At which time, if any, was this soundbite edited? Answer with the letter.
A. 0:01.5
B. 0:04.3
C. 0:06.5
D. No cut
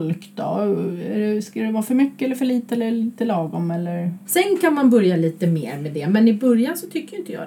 B